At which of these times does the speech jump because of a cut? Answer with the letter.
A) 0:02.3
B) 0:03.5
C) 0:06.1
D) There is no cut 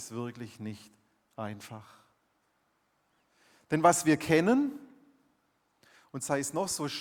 D